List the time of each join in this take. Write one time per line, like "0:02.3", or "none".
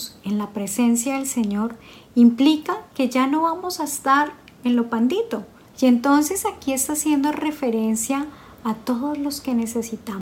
0:05.7